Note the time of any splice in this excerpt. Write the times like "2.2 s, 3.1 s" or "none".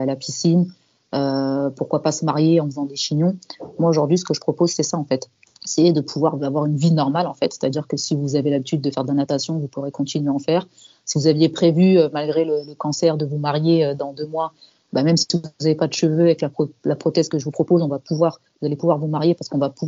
none